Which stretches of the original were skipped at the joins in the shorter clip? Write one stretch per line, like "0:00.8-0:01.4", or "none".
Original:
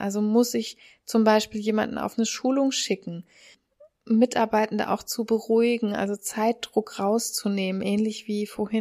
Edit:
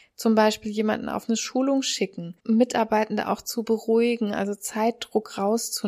0:03.3-0:04.0